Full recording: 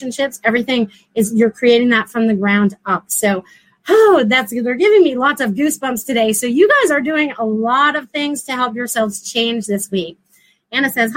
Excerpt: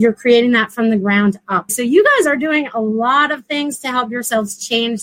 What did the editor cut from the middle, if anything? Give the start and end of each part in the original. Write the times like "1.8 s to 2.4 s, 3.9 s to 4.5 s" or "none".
3.1 s to 6.3 s